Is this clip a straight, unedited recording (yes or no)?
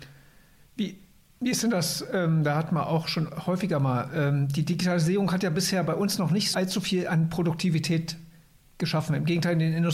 no